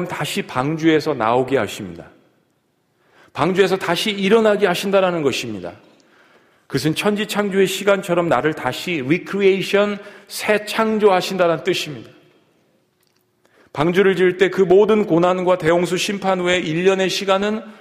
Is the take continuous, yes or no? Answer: yes